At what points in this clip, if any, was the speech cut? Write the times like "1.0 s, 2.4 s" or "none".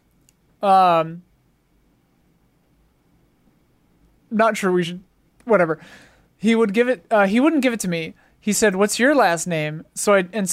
none